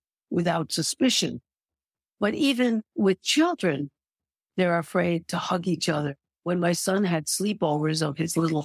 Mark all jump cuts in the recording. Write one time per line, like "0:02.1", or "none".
none